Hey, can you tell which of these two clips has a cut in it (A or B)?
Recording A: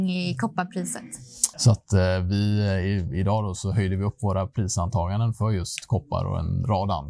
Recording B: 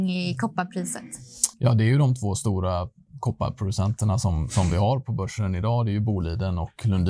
A